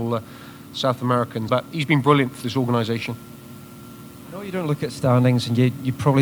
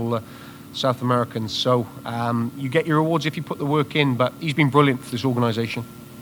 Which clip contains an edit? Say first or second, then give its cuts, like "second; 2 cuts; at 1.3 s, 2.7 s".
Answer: first; 1 cut; at 1.5 s